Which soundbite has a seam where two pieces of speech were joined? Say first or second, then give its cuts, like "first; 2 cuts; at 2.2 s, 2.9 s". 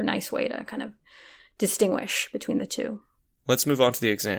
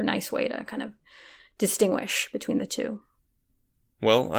first; 1 cut; at 3.3 s